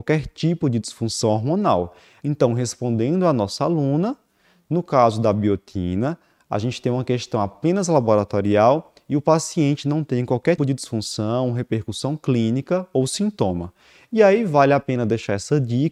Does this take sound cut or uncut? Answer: cut